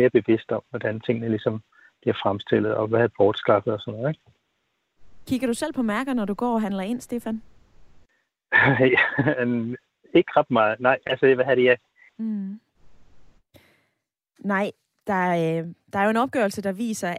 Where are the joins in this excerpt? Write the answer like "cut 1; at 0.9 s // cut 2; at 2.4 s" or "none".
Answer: cut 1; at 12.2 s